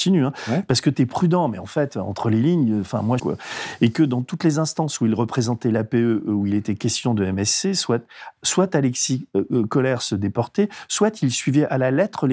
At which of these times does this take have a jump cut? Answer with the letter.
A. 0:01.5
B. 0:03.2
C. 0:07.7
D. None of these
B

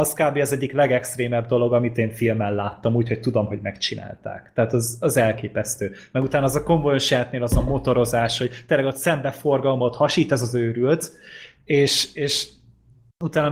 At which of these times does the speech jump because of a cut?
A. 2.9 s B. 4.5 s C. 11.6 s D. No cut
D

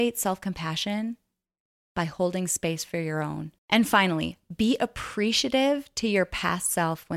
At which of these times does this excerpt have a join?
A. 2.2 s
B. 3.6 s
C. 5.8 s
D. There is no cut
B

